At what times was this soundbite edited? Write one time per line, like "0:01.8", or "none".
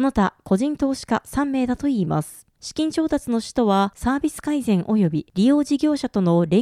none